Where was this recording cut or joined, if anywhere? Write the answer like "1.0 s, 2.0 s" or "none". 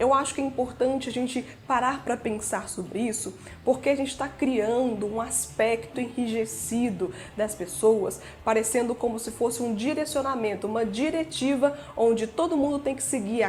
5.9 s